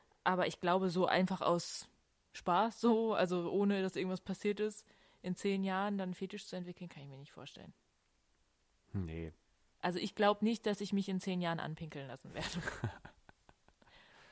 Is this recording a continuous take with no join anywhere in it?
yes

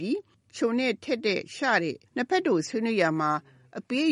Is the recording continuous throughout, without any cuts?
no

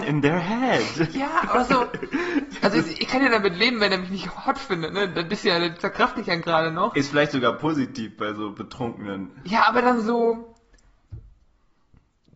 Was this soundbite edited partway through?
no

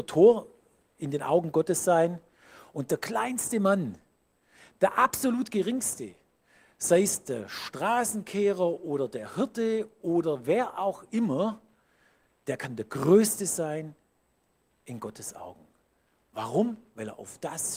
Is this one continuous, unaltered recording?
yes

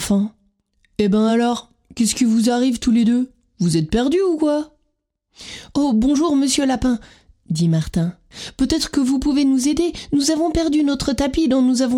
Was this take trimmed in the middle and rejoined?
no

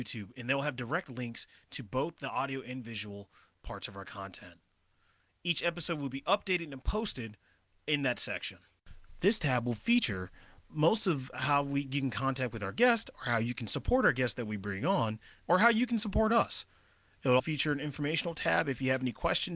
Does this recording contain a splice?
yes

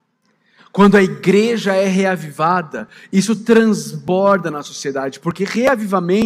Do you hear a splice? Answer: no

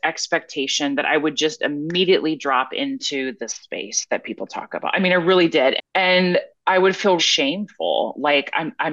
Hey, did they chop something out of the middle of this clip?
yes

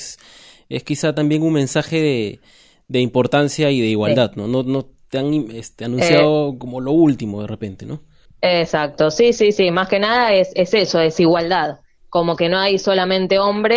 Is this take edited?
no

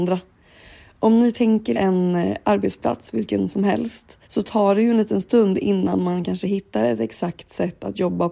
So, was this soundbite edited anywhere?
yes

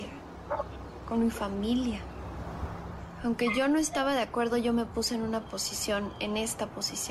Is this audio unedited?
yes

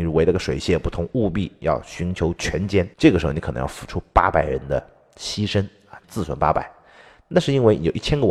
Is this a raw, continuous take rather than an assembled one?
no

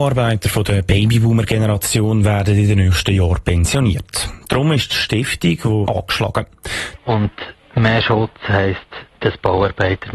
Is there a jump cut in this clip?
yes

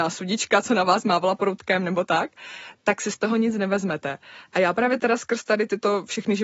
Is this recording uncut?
no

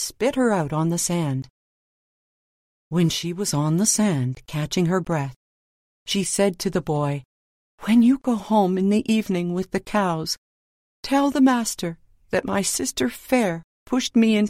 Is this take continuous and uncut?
yes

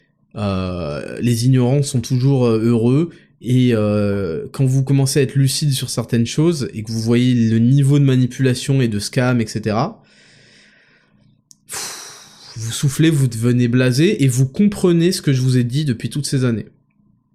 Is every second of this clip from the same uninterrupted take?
yes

